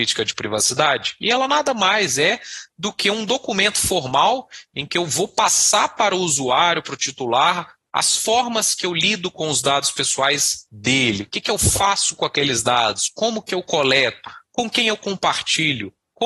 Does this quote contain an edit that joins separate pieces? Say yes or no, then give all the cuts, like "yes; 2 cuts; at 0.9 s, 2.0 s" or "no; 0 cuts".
no; 0 cuts